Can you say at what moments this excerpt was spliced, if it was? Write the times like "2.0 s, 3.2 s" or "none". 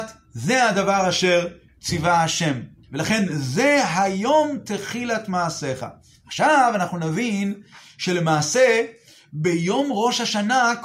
none